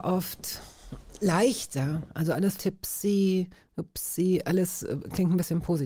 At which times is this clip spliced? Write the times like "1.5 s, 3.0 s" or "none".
2.6 s